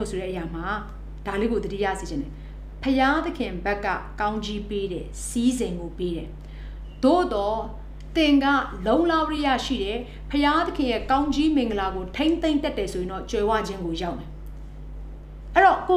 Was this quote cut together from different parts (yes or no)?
no